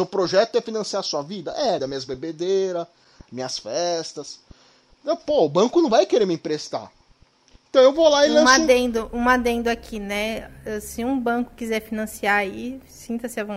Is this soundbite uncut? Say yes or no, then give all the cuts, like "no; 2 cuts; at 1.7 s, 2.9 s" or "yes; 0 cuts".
no; 1 cut; at 1.8 s